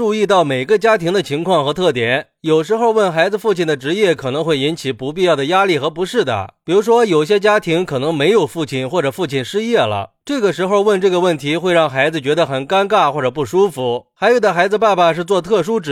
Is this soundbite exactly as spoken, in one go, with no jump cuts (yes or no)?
yes